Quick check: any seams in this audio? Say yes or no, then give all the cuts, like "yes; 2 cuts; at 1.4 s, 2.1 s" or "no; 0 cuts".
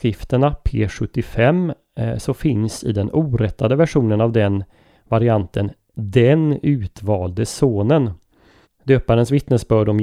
yes; 1 cut; at 8.6 s